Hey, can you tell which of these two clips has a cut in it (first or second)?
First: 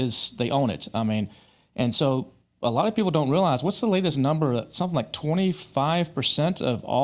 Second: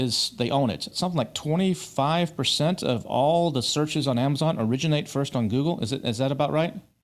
second